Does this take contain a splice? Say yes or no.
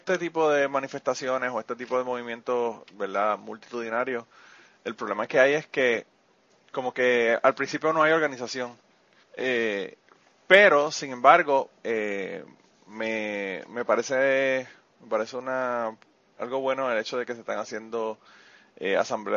yes